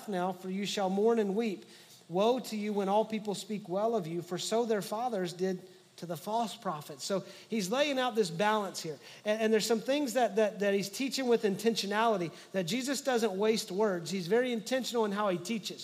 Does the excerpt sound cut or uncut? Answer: uncut